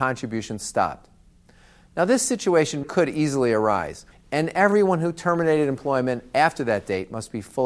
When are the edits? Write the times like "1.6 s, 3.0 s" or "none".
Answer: 2.8 s, 4.1 s